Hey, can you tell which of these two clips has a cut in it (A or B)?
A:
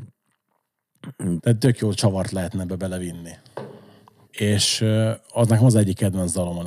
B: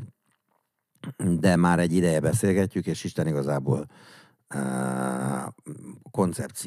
A